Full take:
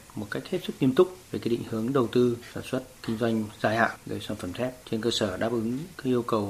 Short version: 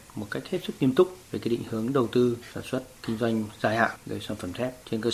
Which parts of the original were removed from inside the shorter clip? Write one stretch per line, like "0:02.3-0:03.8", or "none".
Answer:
none